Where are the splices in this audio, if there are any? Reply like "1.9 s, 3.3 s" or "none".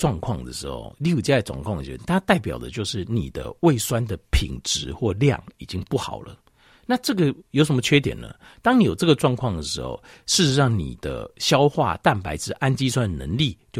none